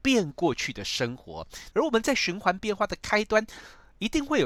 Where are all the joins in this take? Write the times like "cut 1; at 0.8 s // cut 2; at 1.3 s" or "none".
cut 1; at 1.7 s